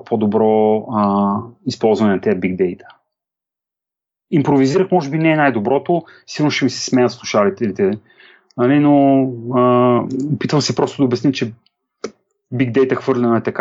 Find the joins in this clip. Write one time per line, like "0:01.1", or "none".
none